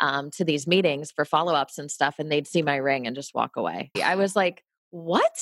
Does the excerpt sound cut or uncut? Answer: cut